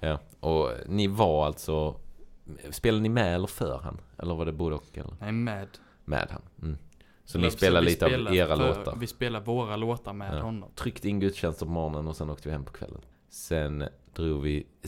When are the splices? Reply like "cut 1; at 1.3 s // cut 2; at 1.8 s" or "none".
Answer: cut 1; at 10.7 s // cut 2; at 13.1 s